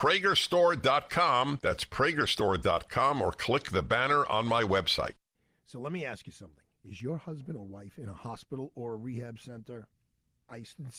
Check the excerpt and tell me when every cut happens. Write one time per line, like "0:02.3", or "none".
none